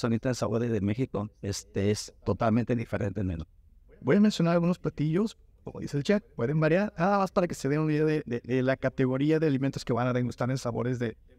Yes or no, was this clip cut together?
no